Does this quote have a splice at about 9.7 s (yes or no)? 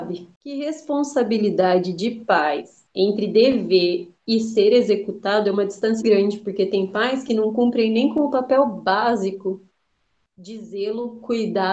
no